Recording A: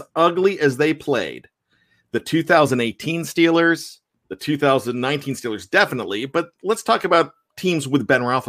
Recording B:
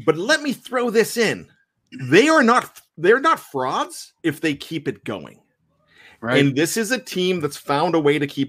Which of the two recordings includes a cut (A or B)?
B